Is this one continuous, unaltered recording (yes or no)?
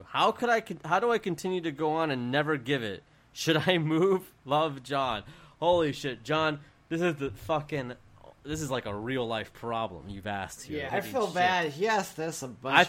no